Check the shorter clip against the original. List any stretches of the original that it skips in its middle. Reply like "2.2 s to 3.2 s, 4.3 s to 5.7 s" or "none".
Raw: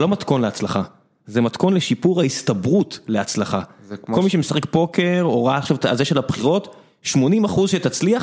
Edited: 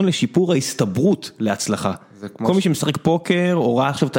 none